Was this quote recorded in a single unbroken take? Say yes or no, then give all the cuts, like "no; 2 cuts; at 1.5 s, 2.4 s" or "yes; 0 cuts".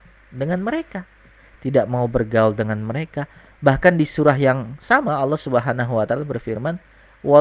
yes; 0 cuts